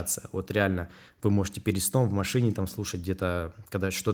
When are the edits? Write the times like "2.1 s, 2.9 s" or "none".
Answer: none